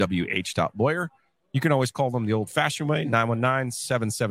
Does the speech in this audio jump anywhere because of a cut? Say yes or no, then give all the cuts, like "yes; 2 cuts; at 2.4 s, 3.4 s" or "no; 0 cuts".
no; 0 cuts